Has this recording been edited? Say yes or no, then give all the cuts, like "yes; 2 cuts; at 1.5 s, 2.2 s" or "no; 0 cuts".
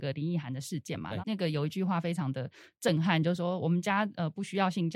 yes; 1 cut; at 1.2 s